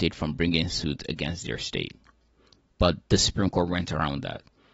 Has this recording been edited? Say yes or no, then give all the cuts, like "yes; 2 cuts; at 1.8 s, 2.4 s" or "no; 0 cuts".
no; 0 cuts